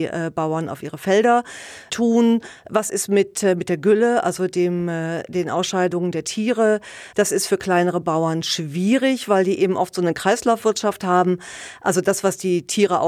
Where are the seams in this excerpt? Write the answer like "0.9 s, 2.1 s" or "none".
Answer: 7.1 s